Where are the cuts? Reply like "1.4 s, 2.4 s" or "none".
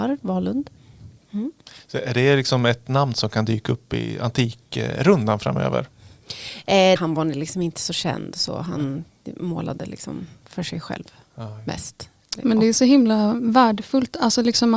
7.0 s